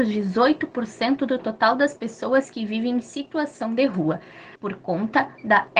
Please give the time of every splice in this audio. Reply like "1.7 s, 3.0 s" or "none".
4.6 s